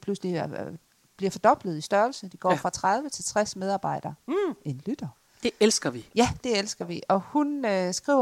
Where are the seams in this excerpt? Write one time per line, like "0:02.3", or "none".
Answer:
0:04.2